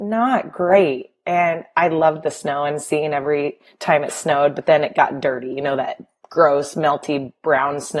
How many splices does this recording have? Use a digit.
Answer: 0